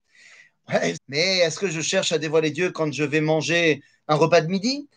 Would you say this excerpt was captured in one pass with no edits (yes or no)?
no